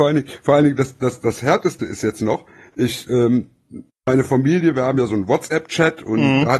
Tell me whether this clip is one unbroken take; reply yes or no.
yes